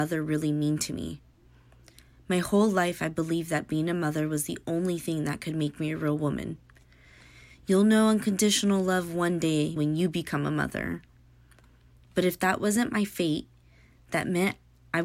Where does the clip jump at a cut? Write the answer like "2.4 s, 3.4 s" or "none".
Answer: 9.8 s